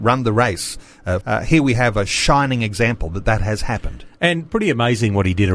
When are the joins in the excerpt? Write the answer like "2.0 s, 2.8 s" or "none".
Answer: 1.2 s